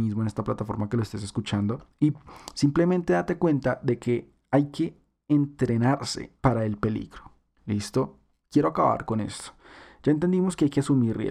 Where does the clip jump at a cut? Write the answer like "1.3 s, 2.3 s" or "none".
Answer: 6.4 s